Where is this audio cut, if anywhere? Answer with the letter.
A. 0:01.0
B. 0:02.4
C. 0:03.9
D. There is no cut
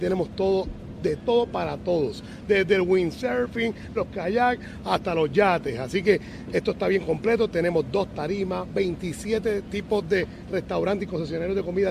C